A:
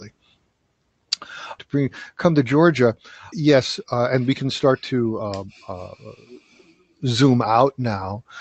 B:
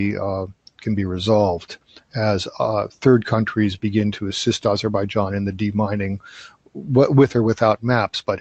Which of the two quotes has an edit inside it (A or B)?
A